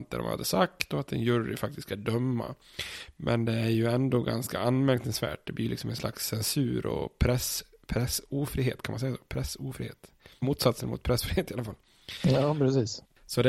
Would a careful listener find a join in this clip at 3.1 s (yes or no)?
no